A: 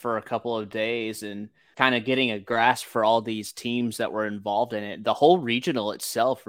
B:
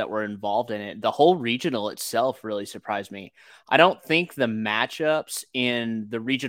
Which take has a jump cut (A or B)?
A